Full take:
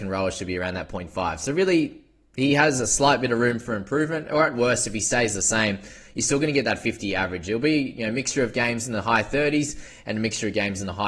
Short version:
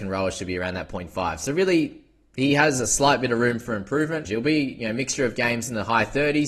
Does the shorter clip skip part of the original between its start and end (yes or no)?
yes